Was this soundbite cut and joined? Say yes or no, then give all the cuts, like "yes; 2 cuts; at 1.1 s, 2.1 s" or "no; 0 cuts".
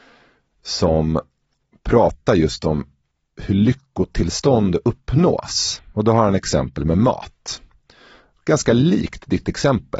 no; 0 cuts